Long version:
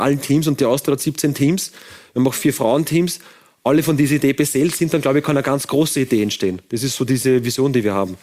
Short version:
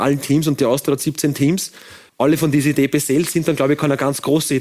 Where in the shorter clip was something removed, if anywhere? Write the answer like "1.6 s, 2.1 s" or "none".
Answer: 2.1 s